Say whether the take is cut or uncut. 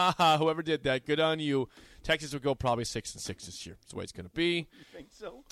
uncut